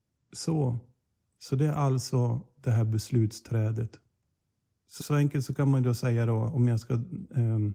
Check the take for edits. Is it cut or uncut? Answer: cut